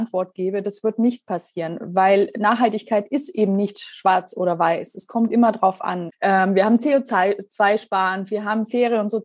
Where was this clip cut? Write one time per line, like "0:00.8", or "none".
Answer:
0:06.1